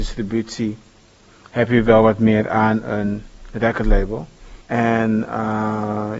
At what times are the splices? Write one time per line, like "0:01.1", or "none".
0:04.6